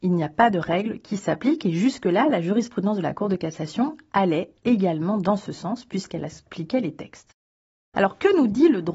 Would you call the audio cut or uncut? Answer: uncut